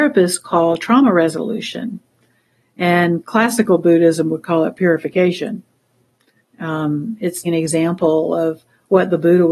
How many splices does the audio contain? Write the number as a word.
two